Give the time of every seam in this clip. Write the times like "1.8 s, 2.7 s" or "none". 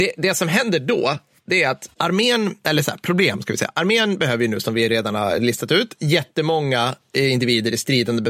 4.6 s